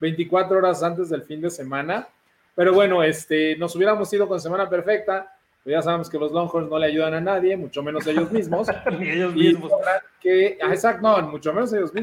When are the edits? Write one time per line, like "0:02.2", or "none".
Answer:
none